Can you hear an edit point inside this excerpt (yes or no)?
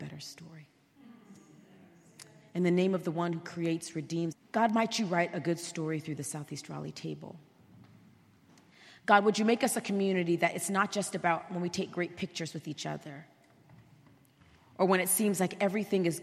yes